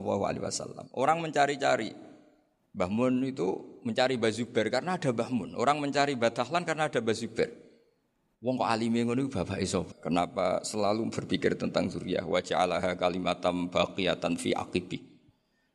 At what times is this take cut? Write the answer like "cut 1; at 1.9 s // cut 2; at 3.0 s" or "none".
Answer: cut 1; at 9.9 s